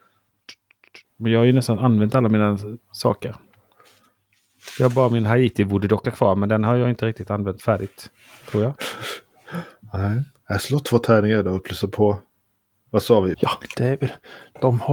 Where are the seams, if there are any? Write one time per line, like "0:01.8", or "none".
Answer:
0:01.0
0:13.3